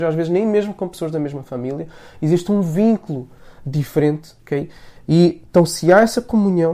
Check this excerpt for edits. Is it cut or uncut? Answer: cut